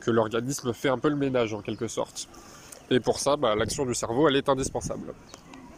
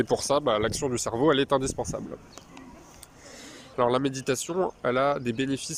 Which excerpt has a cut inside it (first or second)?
second